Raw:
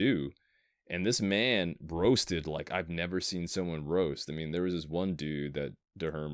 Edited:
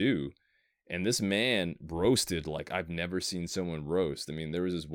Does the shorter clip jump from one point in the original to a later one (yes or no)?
no